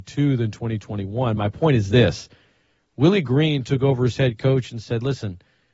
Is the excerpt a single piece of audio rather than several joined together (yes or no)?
yes